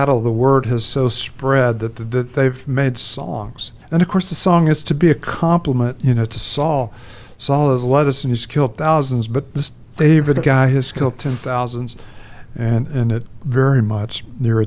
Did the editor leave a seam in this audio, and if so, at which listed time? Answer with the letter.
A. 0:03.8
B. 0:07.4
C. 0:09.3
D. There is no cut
A